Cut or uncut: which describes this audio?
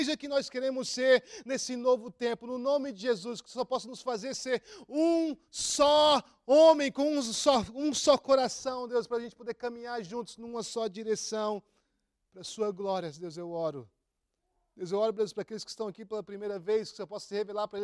uncut